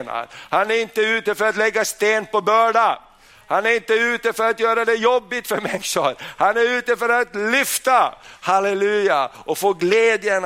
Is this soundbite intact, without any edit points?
yes; 0 cuts

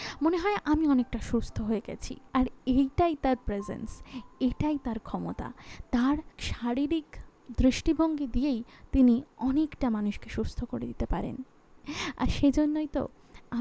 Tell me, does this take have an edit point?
yes; 1 cut; at 2.3 s

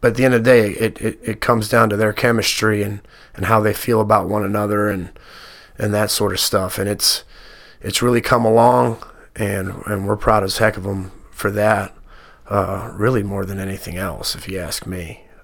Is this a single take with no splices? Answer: yes; 0 cuts

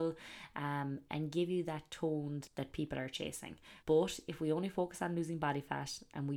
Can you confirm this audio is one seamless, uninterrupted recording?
no; 2 cuts; at 2.5 s, 3.8 s

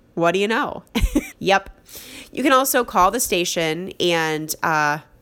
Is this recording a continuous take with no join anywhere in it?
no; 1 cut; at 1.3 s

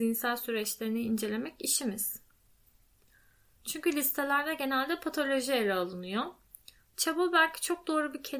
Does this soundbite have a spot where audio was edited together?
yes; 2 cuts; at 3.5 s, 6.8 s

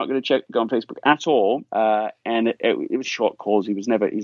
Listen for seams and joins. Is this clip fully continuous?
no; 2 cuts; at 1.7 s, 3.0 s

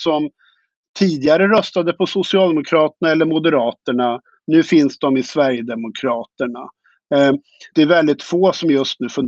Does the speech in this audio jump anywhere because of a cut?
yes; 1 cut; at 7.7 s

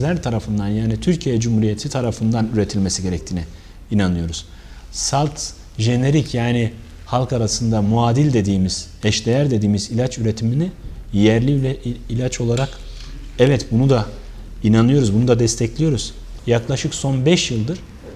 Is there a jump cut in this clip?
yes; 1 cut; at 16.4 s

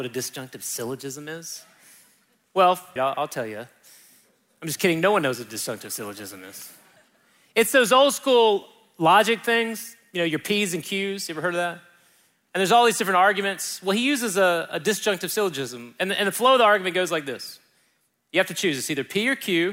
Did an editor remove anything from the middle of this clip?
yes; 1 cut; at 3.0 s

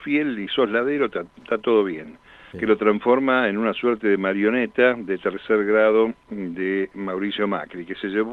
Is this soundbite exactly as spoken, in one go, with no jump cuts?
no; 1 cut; at 2.5 s

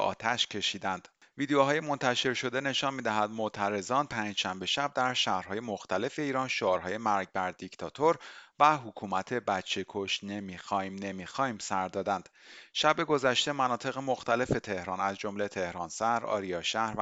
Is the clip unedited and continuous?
yes; 0 cuts

